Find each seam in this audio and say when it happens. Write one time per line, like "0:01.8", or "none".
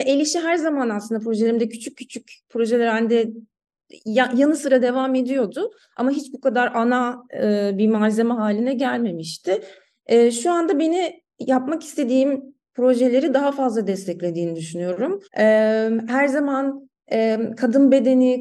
0:15.3